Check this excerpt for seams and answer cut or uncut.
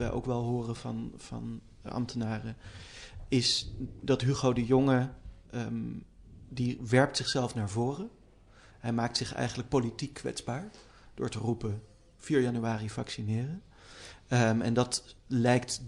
cut